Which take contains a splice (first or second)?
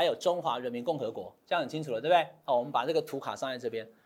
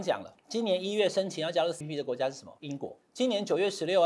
second